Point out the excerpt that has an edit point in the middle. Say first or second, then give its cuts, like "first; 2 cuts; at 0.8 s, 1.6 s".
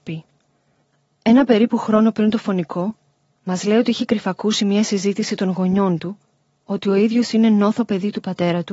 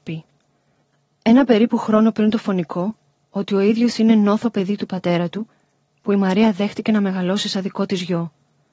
second; 1 cut; at 3.2 s